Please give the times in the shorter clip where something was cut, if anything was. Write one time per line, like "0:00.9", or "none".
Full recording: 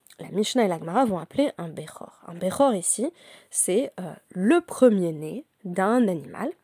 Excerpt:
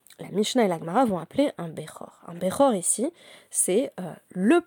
none